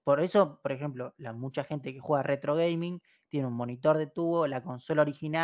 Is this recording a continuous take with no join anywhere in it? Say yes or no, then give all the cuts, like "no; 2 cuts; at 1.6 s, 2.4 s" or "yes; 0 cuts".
yes; 0 cuts